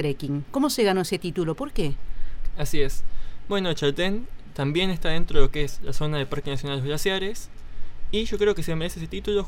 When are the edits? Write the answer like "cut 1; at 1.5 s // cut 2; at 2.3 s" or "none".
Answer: none